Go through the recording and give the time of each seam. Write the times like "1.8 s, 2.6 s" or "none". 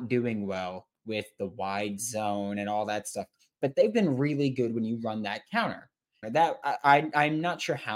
6.2 s